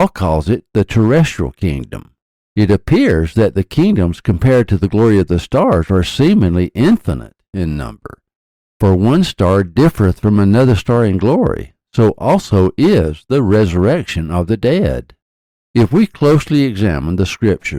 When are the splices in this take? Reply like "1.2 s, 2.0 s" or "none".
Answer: 2.4 s